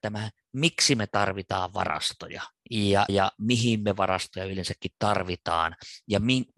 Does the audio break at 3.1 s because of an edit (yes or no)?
yes